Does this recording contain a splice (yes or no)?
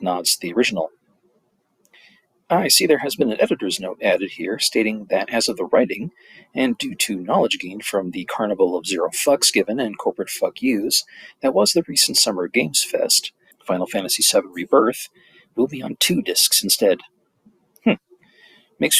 yes